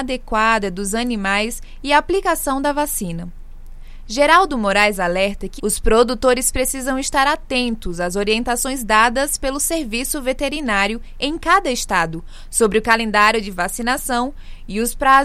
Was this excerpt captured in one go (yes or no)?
no